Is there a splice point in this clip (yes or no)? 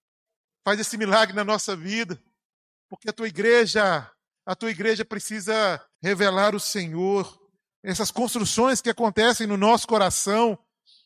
yes